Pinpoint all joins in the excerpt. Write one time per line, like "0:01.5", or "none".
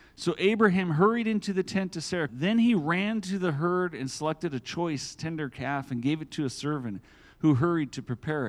0:02.3

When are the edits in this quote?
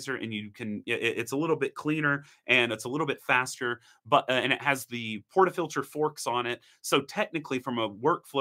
none

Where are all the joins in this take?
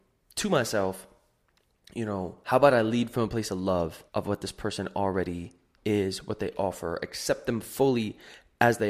0:02.4
0:04.1

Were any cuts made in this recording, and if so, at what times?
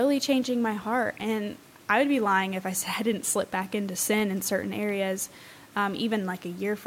none

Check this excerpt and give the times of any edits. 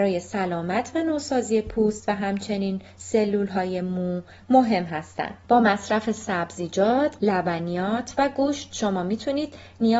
0:07.2

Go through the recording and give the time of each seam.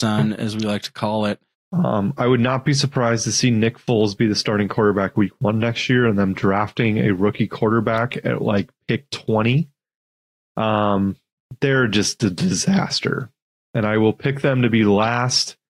0:01.5

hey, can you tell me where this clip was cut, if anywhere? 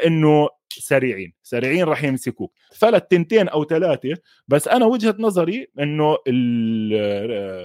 0:02.7

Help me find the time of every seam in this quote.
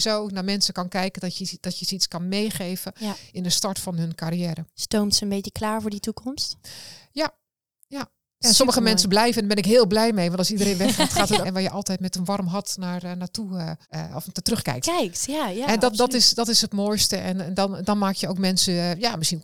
0:11.4
0:13.8

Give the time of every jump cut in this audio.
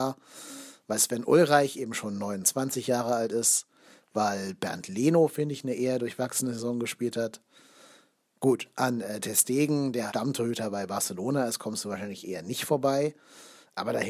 0:10.1

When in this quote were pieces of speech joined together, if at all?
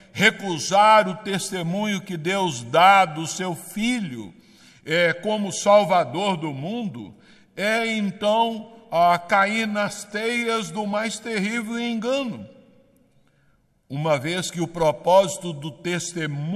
none

